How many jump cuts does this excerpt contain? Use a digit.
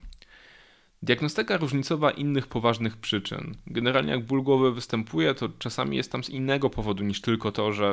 0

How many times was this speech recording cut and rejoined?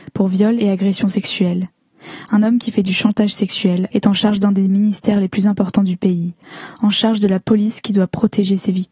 1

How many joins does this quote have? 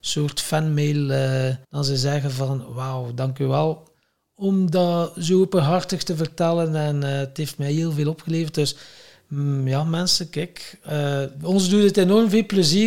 1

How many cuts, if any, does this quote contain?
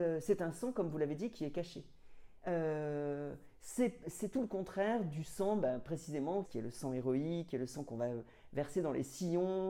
2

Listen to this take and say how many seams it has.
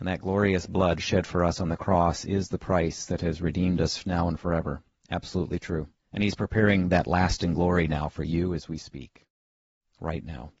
1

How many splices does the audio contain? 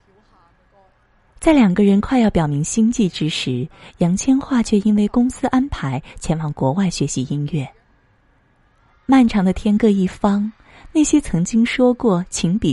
0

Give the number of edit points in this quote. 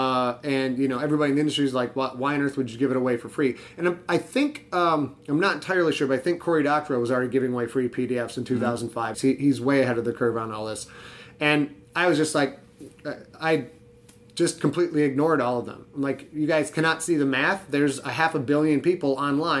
1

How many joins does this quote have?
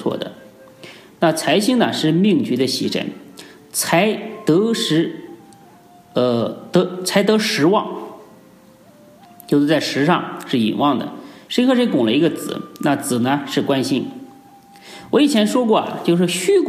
1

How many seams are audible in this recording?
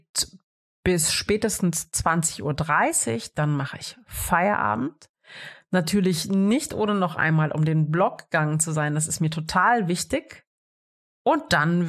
0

